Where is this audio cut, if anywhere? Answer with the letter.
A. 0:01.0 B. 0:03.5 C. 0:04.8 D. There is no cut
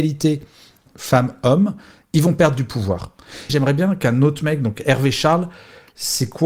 B